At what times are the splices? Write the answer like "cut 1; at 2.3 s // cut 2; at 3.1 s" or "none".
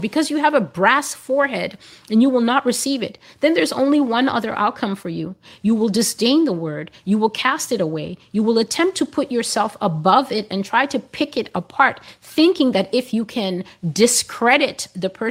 none